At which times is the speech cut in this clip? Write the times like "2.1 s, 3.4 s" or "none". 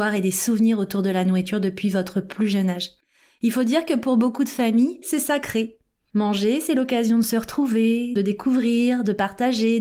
5.0 s, 8.2 s